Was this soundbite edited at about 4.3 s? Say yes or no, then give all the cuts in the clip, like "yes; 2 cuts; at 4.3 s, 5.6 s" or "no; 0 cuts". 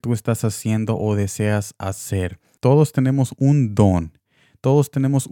no; 1 cut; at 2.6 s